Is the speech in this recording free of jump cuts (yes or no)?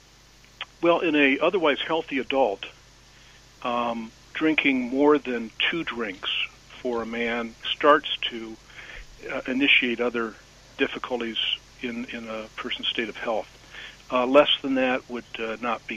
no